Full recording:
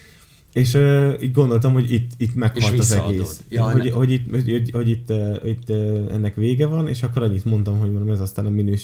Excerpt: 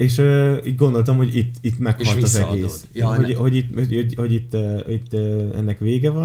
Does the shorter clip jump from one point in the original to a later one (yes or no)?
no